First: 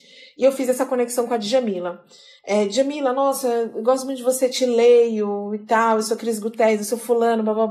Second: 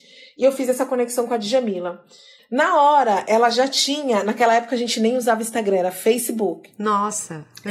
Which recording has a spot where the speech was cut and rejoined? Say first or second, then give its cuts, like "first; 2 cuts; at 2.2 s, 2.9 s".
second; 1 cut; at 2.4 s